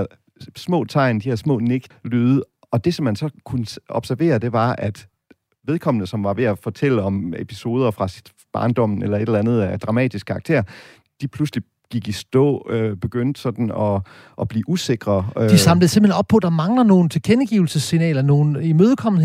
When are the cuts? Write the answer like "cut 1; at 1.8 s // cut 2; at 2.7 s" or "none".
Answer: cut 1; at 1.9 s